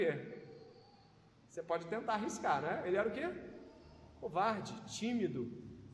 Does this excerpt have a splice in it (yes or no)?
no